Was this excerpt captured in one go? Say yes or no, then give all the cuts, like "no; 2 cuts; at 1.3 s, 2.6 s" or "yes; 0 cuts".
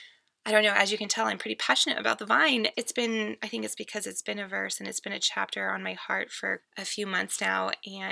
no; 2 cuts; at 2.7 s, 6.6 s